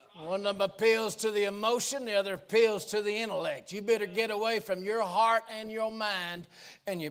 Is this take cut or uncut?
uncut